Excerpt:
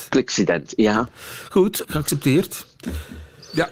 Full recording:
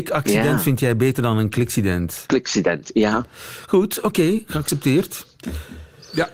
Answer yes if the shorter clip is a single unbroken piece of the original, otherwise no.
no